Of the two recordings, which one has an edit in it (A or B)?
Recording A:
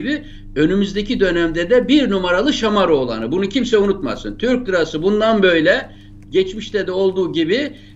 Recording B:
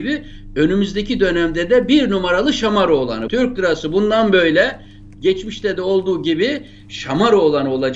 B